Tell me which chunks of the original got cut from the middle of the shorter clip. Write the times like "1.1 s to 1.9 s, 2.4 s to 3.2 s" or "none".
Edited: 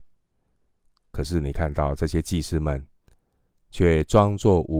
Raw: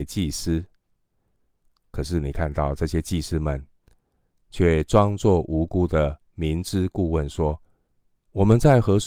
none